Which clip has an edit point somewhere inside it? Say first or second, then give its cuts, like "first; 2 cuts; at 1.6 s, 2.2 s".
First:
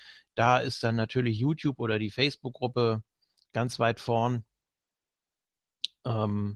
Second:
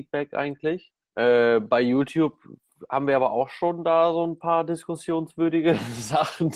second; 1 cut; at 1.0 s